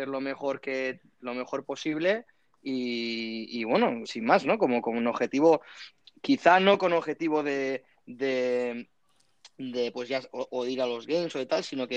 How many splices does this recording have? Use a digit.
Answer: 1